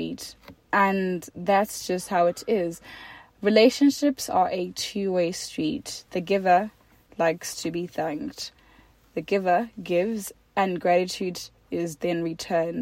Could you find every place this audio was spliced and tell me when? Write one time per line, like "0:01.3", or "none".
none